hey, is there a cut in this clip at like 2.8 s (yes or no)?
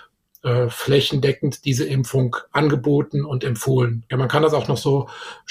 no